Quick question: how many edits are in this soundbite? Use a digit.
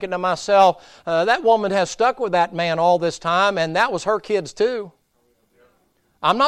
0